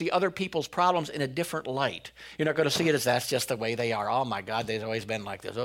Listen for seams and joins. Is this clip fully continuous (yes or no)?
yes